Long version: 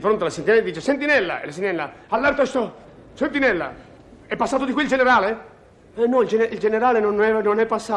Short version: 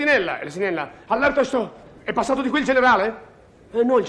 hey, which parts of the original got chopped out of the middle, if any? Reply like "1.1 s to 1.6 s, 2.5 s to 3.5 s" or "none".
3.0 s to 4.2 s